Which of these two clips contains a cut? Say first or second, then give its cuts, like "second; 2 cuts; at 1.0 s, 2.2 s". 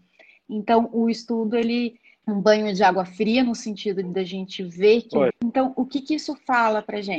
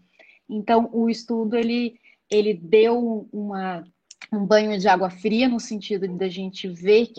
first; 2 cuts; at 2.2 s, 5.3 s